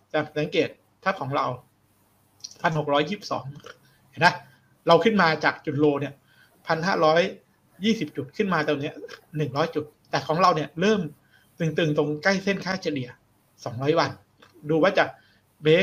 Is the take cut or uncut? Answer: uncut